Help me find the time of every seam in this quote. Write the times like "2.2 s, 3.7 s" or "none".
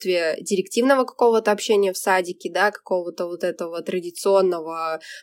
none